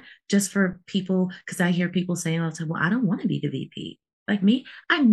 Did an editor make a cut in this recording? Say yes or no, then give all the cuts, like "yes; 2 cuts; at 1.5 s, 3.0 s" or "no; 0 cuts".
no; 0 cuts